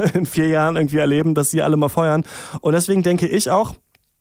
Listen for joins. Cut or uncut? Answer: uncut